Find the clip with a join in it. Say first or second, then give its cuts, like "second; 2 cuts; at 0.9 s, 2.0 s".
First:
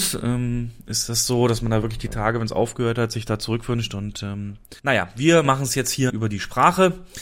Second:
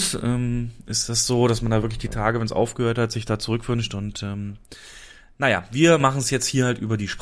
first; 2 cuts; at 4.8 s, 6.1 s